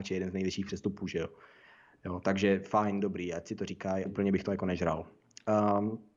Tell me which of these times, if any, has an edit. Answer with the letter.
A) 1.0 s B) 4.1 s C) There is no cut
B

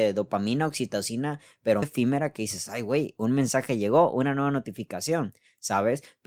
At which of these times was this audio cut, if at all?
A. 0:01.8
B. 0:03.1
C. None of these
A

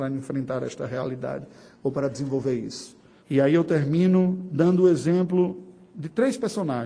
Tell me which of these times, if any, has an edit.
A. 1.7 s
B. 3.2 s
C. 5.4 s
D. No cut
B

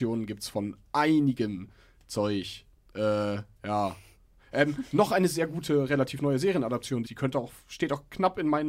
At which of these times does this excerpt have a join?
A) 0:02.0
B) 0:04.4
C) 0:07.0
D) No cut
C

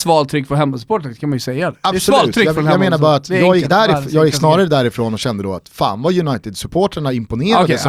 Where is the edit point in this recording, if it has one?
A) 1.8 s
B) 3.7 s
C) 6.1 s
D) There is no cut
D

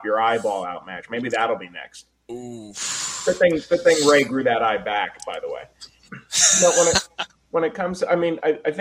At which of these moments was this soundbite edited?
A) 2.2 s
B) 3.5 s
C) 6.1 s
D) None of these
C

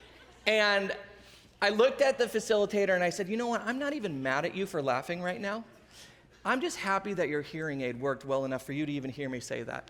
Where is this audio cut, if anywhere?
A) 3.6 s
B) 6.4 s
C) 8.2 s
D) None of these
D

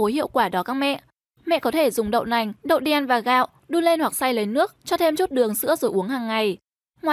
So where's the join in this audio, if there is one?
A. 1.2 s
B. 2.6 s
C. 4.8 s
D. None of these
B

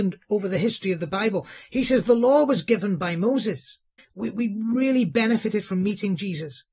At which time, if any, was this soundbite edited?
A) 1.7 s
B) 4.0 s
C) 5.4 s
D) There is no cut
B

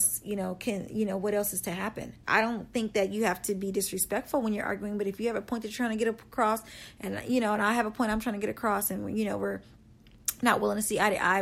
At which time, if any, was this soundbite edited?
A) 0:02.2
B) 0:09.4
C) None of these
A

